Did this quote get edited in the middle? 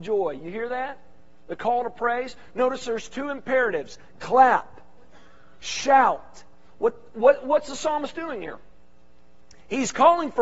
no; 0 cuts

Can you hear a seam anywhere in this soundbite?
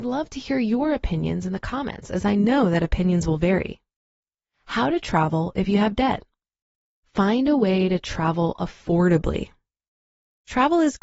no; 0 cuts

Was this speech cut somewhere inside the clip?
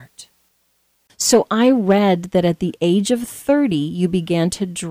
no; 0 cuts

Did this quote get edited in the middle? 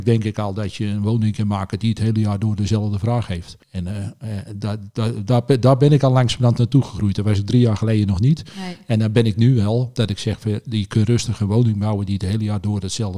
yes; 1 cut; at 3.6 s

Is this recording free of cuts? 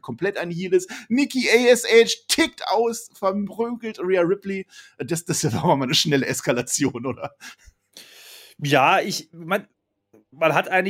yes; 0 cuts

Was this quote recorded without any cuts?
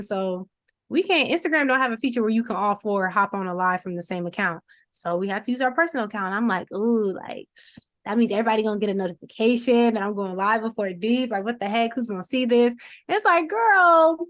yes; 0 cuts

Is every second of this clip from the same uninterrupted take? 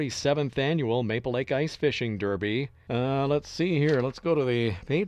no; 1 cut; at 2.9 s

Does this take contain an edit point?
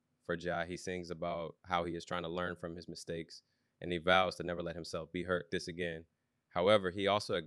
yes; 1 cut; at 5.5 s

